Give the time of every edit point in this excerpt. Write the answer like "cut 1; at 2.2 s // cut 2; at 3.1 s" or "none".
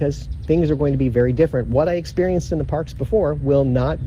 none